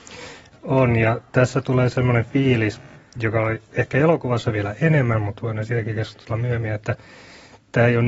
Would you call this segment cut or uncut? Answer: uncut